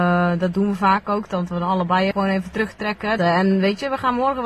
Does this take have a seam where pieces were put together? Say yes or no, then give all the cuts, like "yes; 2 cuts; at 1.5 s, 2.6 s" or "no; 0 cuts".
yes; 2 cuts; at 2.1 s, 3.2 s